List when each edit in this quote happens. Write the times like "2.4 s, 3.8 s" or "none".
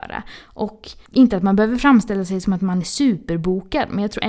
1.1 s